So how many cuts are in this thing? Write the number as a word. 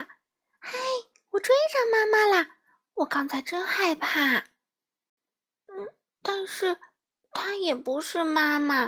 zero